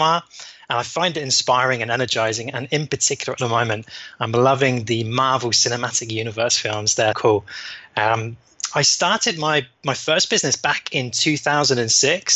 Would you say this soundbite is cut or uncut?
cut